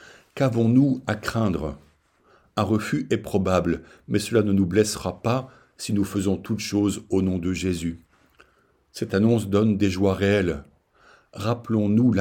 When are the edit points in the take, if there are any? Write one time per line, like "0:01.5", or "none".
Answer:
none